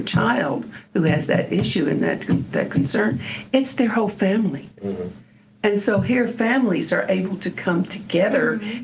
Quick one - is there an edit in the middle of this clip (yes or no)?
no